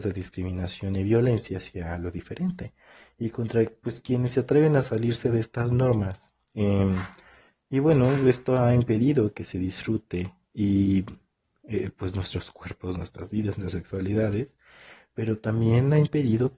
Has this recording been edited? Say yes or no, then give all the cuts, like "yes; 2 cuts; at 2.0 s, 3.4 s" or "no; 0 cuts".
no; 0 cuts